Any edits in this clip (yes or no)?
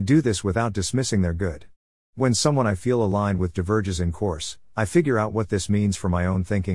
no